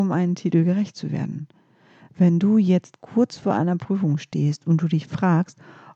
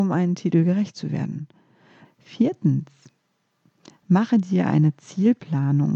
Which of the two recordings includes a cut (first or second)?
second